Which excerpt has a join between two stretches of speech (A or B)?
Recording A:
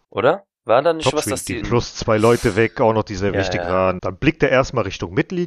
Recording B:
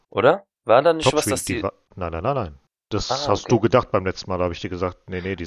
A